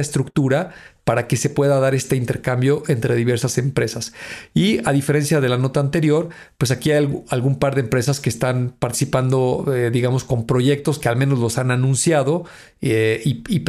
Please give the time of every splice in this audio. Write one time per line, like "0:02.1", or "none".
none